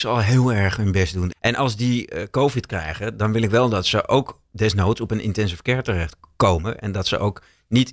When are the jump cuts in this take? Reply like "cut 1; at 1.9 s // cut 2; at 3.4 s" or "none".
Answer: cut 1; at 1.3 s

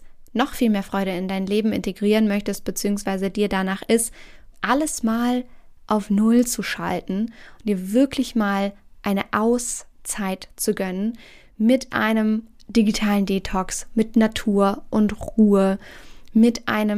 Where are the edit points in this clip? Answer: cut 1; at 4.5 s

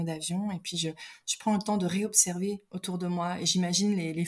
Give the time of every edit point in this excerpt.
cut 1; at 2.7 s

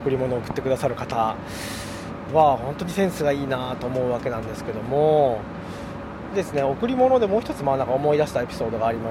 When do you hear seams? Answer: cut 1; at 6.3 s

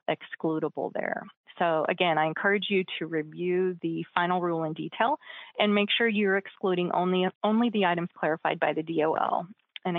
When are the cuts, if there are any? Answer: cut 1; at 7.4 s

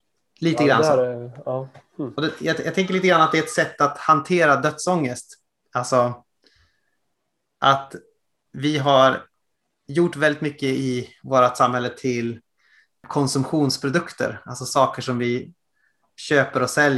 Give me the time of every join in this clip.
none

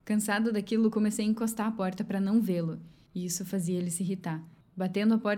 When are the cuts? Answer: none

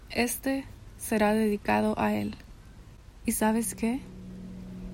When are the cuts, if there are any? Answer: cut 1; at 3.2 s

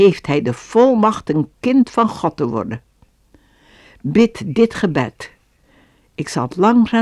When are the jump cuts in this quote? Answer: none

